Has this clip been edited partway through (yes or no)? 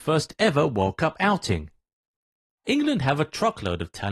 yes